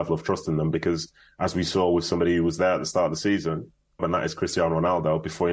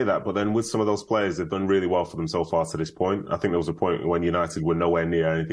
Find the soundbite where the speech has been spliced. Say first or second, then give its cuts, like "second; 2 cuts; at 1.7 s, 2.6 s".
first; 1 cut; at 4.0 s